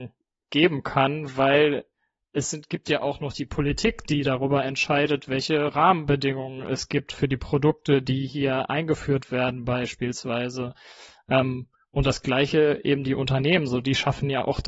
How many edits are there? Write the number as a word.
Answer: zero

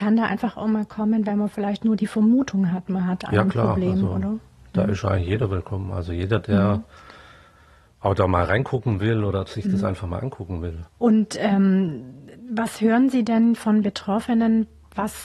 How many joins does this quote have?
zero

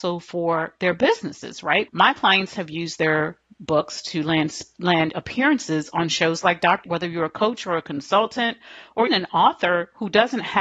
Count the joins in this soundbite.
three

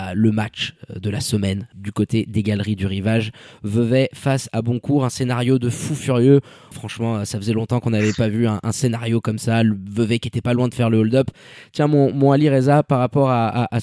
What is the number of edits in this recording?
one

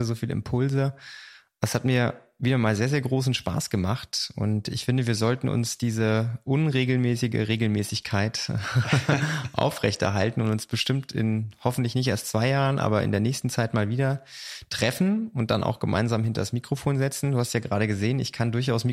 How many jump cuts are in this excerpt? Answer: zero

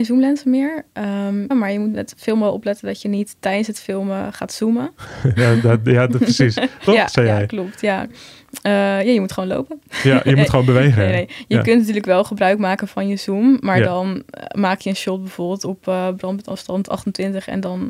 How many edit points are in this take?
two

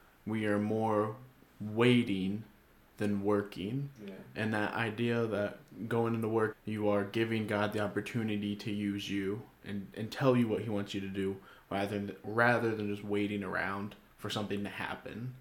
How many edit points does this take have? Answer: one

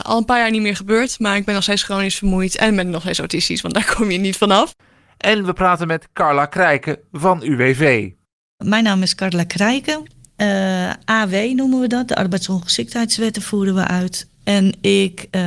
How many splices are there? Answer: two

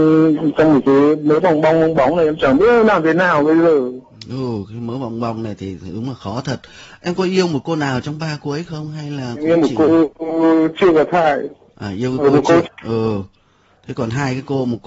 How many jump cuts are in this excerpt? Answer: one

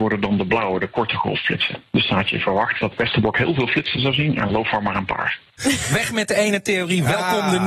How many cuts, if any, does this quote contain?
one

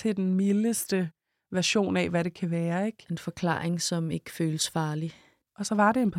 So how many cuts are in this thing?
zero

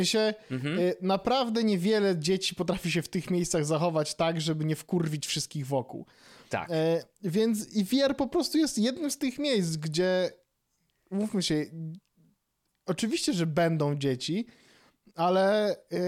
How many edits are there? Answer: zero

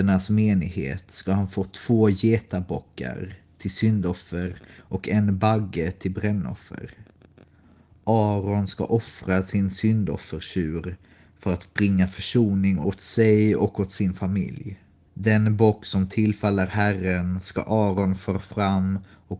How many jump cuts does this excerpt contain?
one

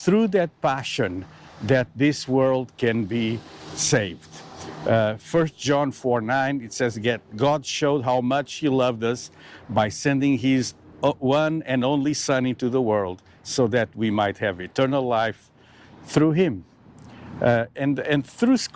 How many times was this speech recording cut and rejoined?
zero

